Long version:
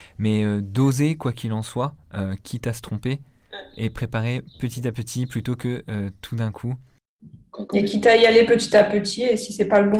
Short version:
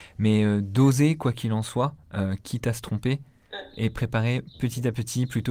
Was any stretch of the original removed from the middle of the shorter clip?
no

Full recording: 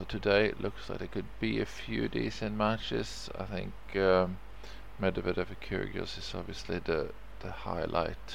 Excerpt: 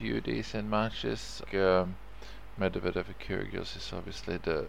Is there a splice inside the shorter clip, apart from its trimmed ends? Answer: yes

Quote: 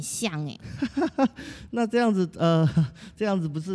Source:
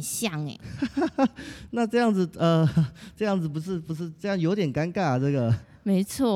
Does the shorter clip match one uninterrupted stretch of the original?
yes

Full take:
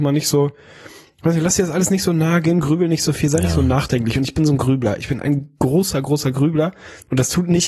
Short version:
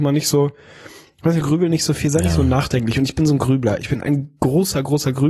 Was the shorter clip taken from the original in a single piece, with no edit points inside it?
no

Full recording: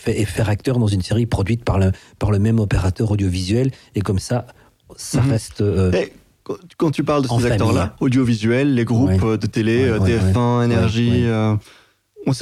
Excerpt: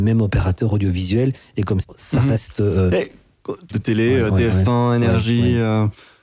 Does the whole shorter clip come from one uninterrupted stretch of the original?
no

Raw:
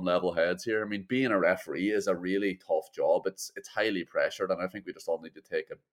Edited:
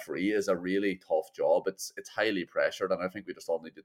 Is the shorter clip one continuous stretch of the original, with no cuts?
yes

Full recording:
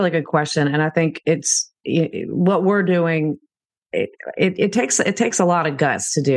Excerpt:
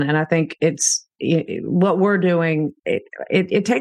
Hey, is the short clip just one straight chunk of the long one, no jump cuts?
no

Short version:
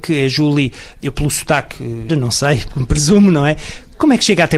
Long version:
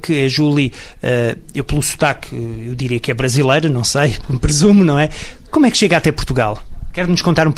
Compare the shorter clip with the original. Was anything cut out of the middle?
yes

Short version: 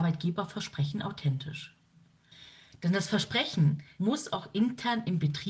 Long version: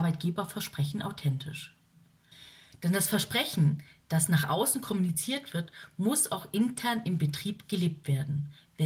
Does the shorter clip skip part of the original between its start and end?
yes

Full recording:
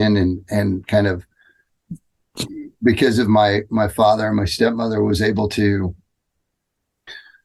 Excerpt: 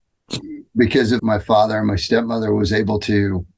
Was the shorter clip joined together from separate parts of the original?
yes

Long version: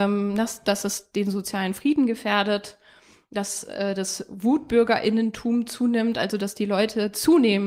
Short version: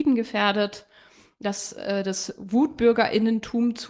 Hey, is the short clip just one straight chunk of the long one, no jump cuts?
yes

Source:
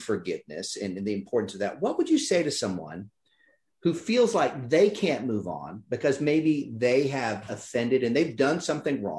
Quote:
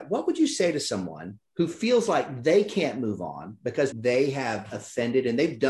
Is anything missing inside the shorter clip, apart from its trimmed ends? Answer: yes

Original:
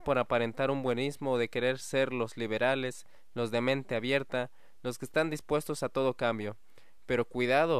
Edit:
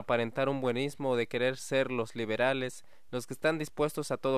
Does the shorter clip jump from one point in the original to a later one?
yes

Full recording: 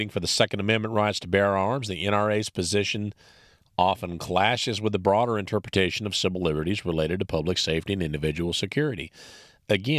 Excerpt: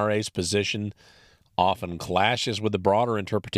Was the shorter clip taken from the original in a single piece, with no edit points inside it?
yes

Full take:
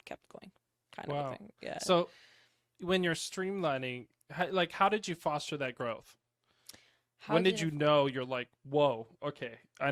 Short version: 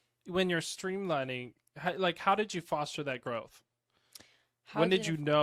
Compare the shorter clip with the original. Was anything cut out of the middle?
no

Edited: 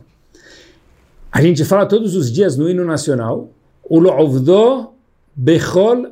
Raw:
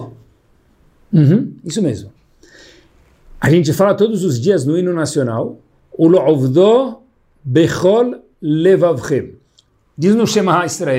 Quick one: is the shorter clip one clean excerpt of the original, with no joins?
yes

